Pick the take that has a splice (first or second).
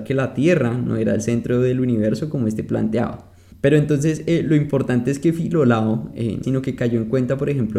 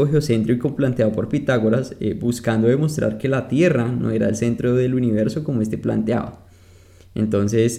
first